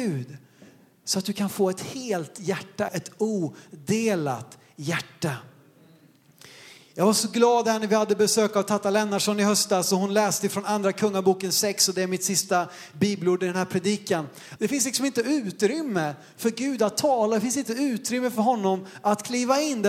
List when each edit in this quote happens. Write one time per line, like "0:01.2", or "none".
0:02.9
0:14.6